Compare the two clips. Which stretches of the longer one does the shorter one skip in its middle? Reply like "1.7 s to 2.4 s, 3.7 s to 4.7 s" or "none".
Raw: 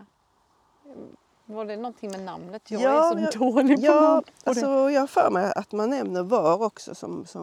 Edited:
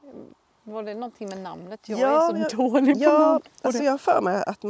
4.6 s to 4.9 s